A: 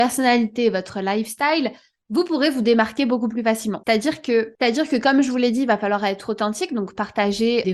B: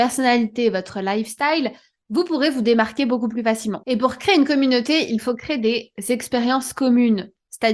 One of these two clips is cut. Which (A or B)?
A